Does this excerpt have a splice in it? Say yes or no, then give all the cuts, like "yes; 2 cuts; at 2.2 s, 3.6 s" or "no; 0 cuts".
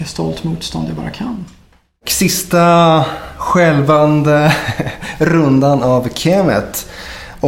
no; 0 cuts